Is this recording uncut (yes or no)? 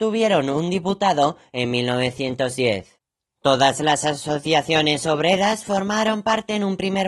yes